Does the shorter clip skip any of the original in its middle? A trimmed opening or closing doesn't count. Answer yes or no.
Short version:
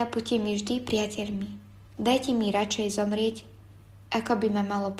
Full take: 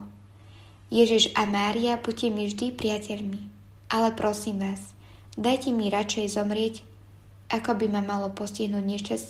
yes